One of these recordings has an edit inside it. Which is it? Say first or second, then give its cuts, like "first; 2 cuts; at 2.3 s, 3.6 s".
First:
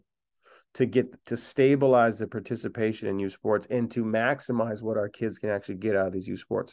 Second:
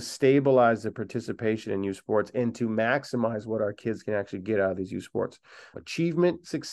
second; 1 cut; at 5.7 s